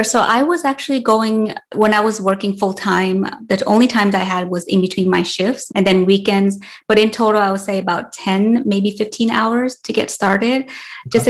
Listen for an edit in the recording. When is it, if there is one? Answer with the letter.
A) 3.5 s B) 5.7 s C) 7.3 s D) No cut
B